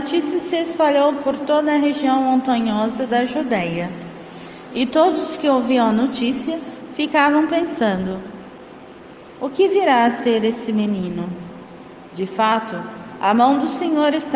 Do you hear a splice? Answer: no; 0 cuts

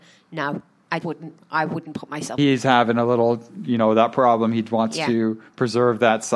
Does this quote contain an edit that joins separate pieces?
yes; 2 cuts; at 1.0 s, 2.4 s

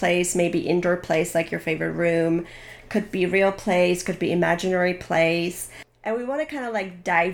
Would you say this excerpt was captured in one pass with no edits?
yes; 0 cuts

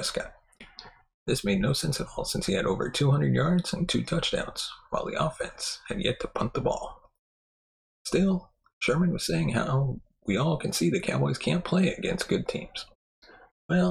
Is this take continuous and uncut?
yes; 0 cuts

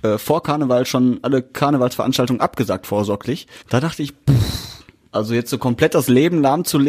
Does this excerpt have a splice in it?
yes; 1 cut; at 3.6 s

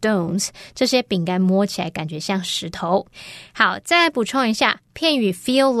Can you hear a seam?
no; 0 cuts

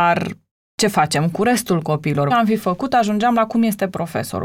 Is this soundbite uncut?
no; 1 cut; at 2.3 s

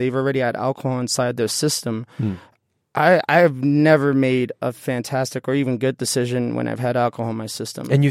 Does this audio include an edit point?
no; 0 cuts

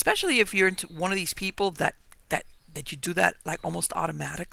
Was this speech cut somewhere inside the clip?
no; 0 cuts

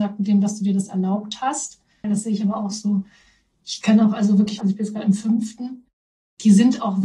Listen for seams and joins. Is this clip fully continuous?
no; 2 cuts; at 2.0 s, 4.6 s

